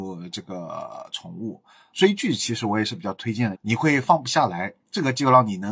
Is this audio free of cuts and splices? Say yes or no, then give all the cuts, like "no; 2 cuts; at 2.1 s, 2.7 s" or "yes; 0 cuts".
no; 2 cuts; at 1.9 s, 3.5 s